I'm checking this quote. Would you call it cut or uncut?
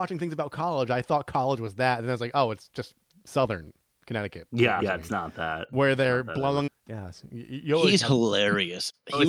cut